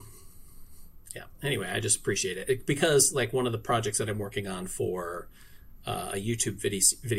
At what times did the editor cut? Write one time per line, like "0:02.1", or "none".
none